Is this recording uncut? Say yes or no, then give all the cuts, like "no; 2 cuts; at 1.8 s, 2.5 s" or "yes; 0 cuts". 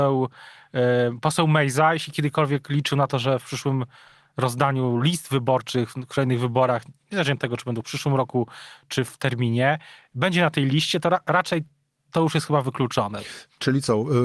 yes; 0 cuts